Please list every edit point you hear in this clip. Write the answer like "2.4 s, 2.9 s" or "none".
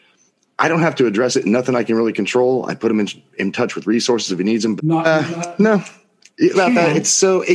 4.8 s, 6.5 s